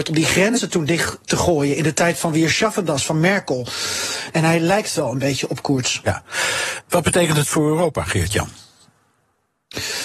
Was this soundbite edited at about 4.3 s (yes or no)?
yes